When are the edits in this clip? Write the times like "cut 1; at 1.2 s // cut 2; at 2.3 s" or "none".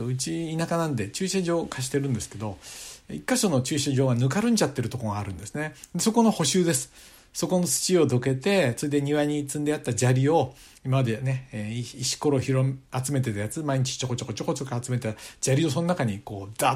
none